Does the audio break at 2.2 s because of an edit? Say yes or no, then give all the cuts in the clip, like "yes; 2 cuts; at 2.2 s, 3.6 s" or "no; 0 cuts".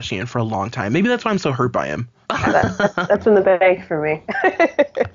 yes; 1 cut; at 2.2 s